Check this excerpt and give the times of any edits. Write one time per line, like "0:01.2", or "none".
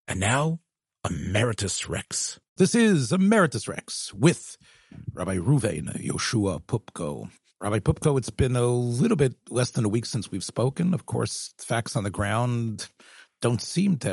0:02.6